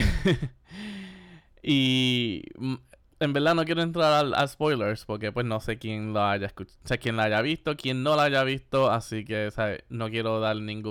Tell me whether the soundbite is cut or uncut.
uncut